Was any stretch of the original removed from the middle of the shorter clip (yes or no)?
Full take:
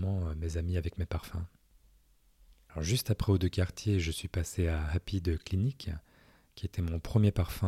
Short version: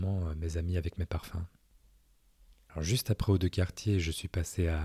no